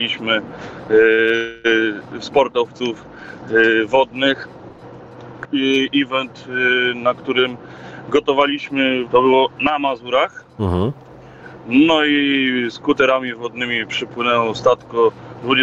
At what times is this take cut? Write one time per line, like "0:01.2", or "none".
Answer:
0:05.4
0:09.1